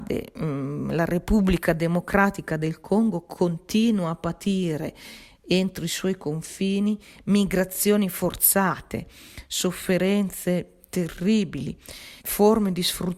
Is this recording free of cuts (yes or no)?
no